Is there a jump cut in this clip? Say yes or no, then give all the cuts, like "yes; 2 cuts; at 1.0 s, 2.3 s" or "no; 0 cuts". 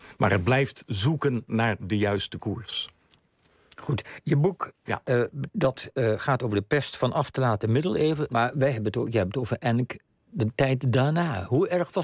yes; 2 cuts; at 4.9 s, 8.3 s